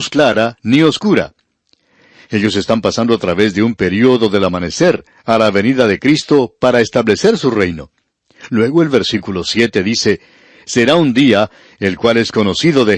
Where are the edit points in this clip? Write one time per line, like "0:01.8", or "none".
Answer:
none